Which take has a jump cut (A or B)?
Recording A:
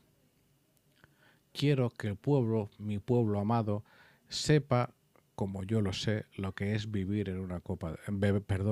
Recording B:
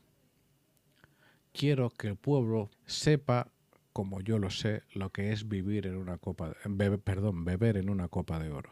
B